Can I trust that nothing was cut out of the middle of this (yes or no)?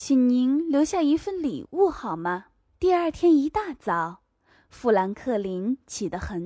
no